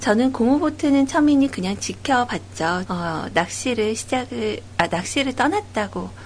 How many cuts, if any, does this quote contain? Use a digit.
1